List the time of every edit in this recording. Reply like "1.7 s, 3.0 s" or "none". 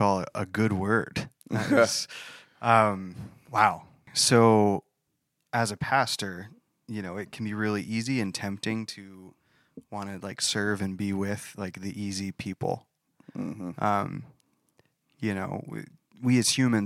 none